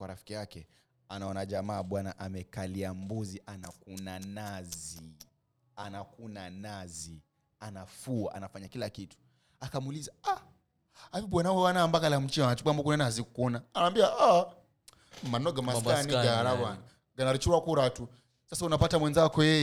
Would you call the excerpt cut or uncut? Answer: uncut